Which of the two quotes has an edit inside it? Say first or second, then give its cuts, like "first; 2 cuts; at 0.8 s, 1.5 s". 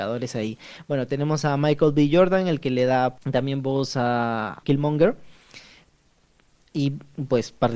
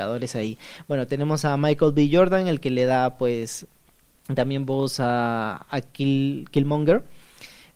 first; 2 cuts; at 3.2 s, 4.6 s